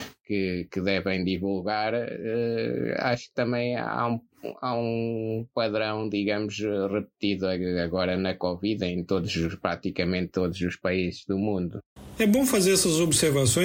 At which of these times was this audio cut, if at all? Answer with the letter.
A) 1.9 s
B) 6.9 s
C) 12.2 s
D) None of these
C